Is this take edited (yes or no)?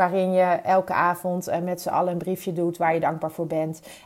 no